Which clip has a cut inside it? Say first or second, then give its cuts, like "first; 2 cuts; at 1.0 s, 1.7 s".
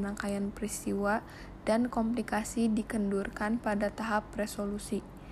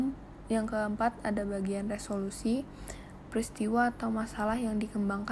second; 1 cut; at 3.2 s